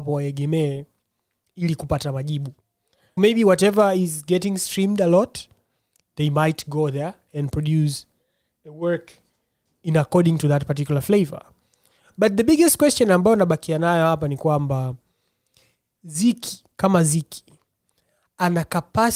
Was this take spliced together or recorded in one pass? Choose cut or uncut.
cut